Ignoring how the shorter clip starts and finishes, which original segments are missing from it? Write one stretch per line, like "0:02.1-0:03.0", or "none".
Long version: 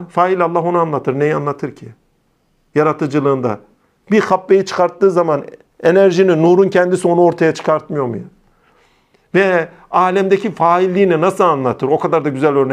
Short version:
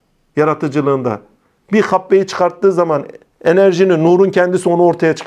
none